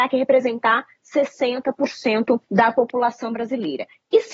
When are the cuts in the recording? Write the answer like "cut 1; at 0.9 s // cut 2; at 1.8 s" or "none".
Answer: cut 1; at 2.4 s